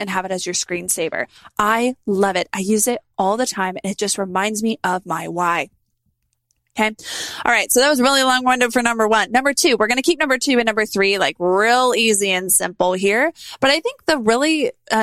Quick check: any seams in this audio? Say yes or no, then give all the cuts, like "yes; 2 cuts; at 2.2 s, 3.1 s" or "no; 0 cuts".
no; 0 cuts